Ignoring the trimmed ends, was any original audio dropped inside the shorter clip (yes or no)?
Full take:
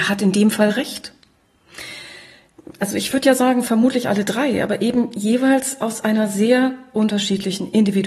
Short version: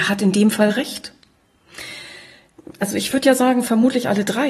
no